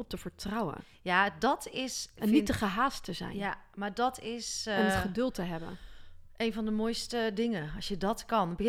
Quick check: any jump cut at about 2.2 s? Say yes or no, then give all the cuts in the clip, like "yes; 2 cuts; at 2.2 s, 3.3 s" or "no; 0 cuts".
no; 0 cuts